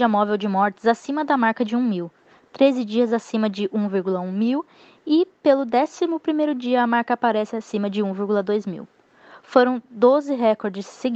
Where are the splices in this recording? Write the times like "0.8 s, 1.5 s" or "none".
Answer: none